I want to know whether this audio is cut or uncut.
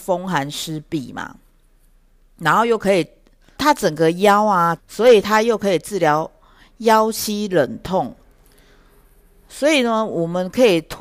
cut